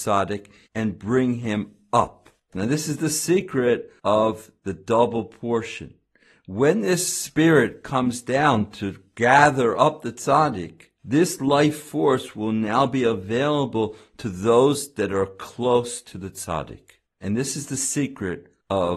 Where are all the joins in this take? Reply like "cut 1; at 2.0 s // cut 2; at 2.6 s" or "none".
none